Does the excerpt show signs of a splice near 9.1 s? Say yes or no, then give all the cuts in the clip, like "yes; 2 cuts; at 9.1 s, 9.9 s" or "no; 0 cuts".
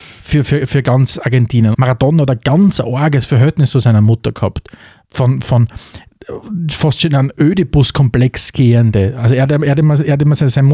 no; 1 cut; at 1.7 s